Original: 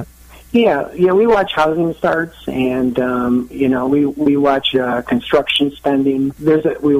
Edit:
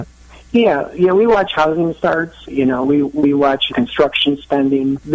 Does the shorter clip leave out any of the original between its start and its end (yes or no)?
yes